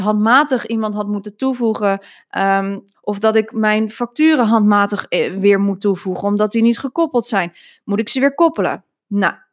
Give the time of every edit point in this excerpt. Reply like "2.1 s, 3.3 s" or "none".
2.9 s

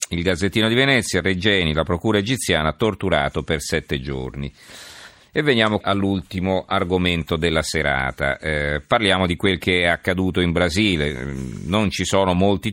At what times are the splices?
5.8 s

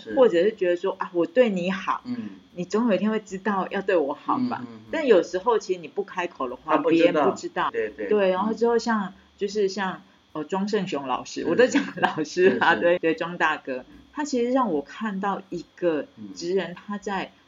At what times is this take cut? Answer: 7.7 s, 13.0 s

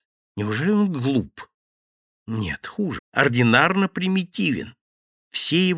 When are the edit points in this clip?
3.0 s

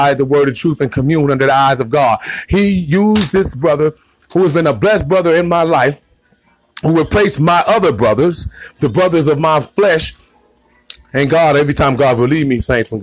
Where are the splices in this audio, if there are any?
none

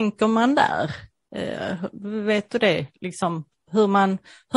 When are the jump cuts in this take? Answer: none

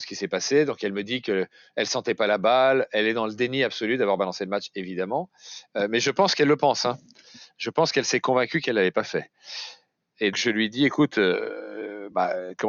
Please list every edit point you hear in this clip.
10.3 s

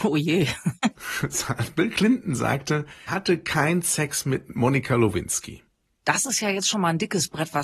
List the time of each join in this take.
3.1 s, 6.0 s

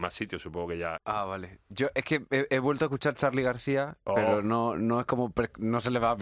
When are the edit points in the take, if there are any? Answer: 1.0 s

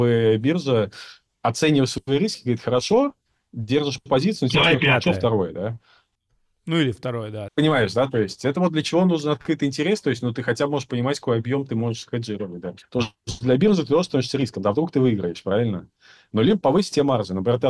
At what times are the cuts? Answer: 7.5 s, 12.8 s

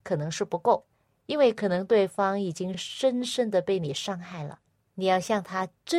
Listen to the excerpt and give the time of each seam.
none

